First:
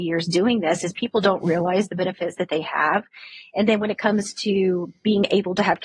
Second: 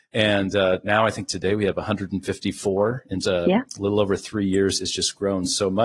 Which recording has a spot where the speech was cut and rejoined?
second; 1 cut; at 3.2 s

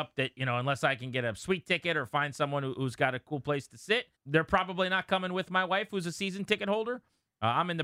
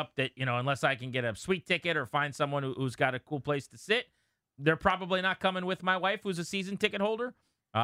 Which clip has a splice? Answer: first; 1 cut; at 4.1 s

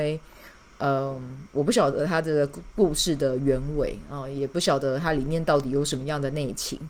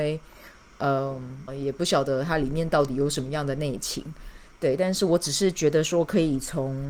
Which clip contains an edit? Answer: second; 1 cut; at 1.5 s

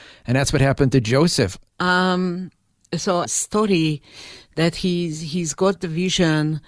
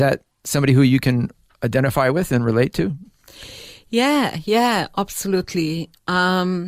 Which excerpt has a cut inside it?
first; 2 cuts; at 1.7 s, 3.3 s

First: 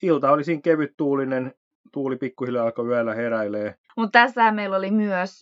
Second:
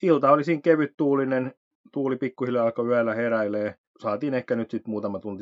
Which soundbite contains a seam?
first; 1 cut; at 3.8 s

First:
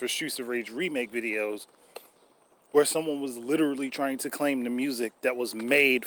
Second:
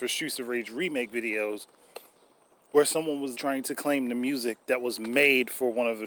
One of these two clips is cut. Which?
second; 1 cut; at 3.3 s

